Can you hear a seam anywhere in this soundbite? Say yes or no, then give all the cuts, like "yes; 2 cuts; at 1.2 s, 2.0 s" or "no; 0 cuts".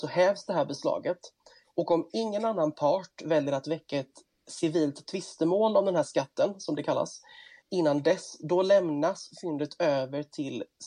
yes; 1 cut; at 7.6 s